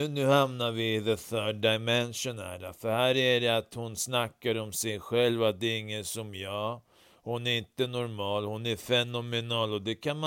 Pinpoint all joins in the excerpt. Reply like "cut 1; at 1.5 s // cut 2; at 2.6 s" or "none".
none